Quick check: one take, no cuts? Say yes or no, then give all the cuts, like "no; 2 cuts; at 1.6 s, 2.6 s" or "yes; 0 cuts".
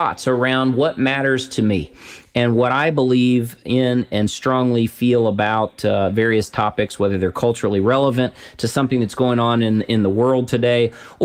yes; 0 cuts